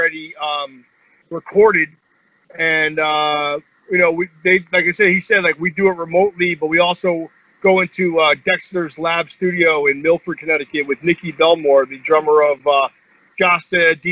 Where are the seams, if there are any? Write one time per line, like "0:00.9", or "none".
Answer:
none